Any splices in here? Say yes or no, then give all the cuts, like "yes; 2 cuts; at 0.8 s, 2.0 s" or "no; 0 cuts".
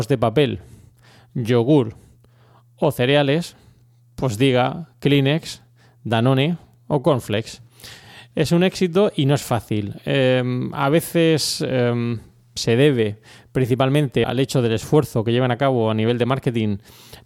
yes; 1 cut; at 14.2 s